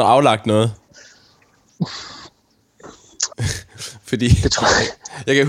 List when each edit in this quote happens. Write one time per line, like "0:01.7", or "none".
0:03.3